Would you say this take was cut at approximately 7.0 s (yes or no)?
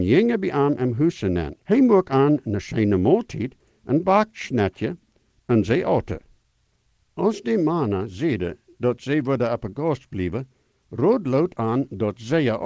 no